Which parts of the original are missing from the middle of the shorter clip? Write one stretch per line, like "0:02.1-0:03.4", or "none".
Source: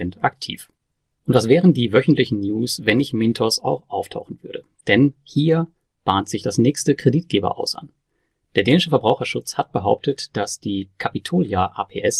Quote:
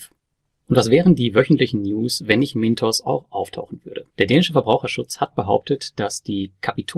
0:04.7-0:08.5